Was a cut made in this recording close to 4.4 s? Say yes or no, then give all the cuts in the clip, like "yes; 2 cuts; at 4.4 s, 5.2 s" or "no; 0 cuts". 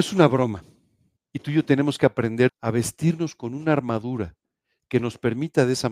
no; 2 cuts; at 1.2 s, 2.5 s